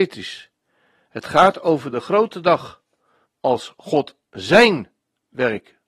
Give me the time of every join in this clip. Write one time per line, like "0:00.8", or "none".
0:03.3